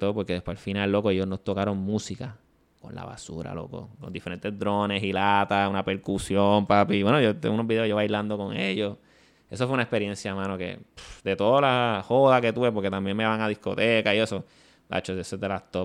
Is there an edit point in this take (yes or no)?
no